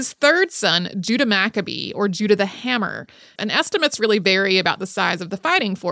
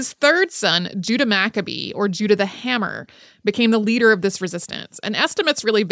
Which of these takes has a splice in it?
first; 1 cut; at 3.4 s

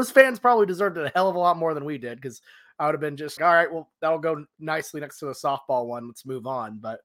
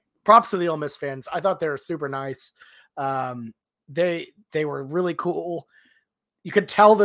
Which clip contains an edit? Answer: first; 1 cut; at 3.4 s

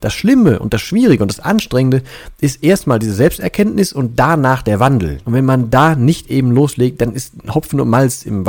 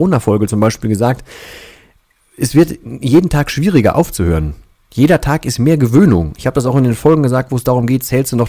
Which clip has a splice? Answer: first; 1 cut; at 5.2 s

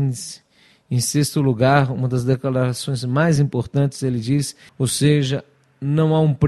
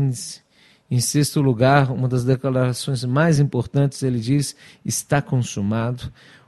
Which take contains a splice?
first; 1 cut; at 4.7 s

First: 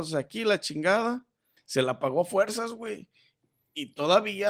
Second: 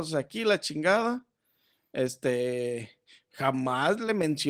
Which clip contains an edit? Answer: first; 1 cut; at 1.6 s

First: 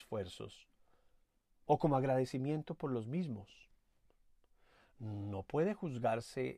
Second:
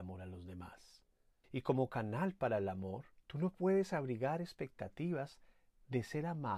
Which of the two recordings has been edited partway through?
second; 2 cuts; at 1.4 s, 3.2 s

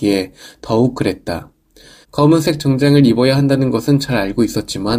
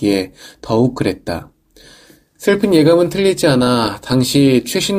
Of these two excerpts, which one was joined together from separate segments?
first; 1 cut; at 2.0 s

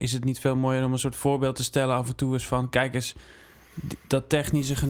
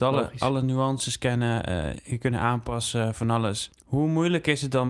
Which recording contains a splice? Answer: second; 2 cuts; at 1.9 s, 3.7 s

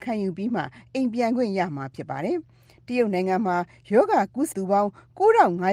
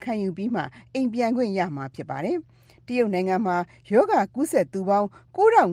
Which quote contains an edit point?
first; 1 cut; at 4.5 s

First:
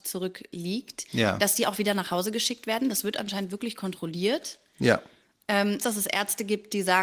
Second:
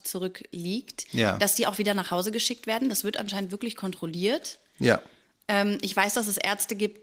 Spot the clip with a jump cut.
first; 1 cut; at 5.8 s

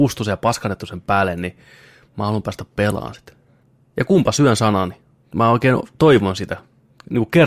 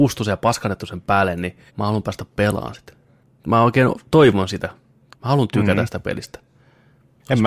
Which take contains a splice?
second; 3 cuts; at 1.7 s, 3.4 s, 5.1 s

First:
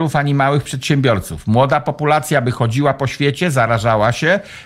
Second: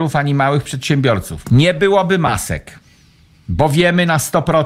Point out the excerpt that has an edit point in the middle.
second; 1 cut; at 1.4 s

